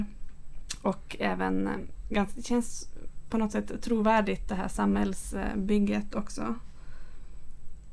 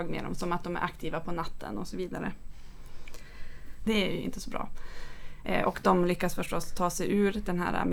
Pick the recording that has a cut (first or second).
second